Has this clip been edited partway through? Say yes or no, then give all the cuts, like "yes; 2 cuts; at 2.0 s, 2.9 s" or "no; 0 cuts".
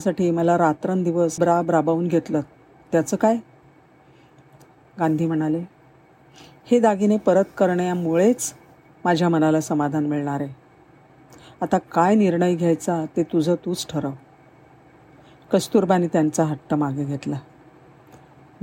yes; 1 cut; at 1.4 s